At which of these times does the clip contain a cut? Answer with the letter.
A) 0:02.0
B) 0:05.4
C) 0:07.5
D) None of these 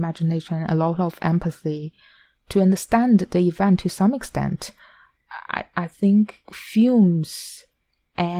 D